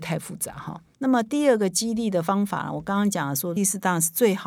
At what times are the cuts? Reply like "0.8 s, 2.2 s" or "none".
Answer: 3.6 s